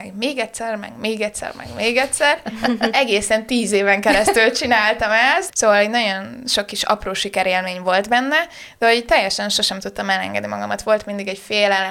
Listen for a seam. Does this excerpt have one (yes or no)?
yes